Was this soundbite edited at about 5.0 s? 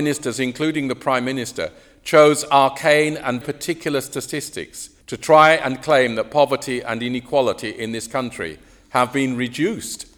yes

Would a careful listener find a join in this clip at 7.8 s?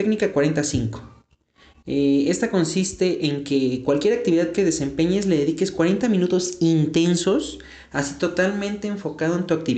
no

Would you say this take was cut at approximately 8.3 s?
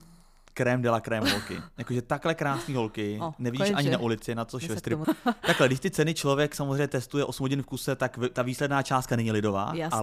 no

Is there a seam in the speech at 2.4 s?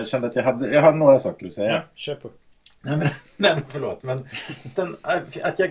no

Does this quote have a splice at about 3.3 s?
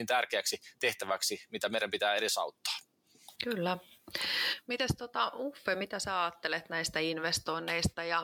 yes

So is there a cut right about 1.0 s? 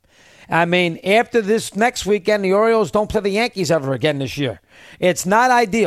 no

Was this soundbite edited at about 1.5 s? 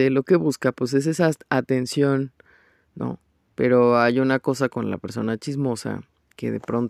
no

